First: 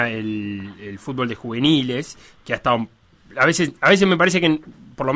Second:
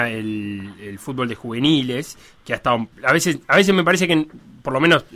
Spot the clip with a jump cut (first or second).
second